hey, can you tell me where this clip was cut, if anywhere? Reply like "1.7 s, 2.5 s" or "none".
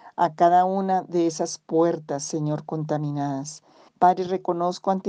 3.9 s

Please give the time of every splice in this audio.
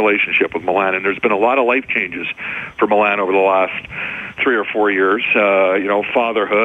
none

